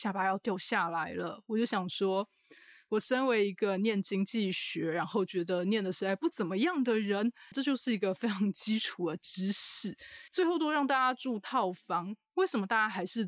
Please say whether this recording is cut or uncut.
cut